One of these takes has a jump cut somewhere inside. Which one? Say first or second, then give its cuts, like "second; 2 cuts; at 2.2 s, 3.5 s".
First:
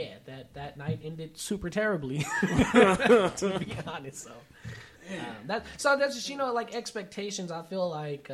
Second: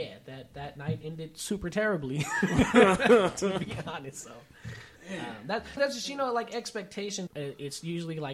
second; 2 cuts; at 5.8 s, 7.3 s